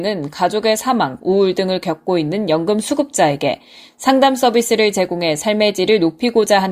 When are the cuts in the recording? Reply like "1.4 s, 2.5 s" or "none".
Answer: 1.2 s